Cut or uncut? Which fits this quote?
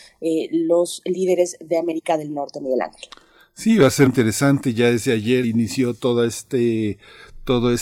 cut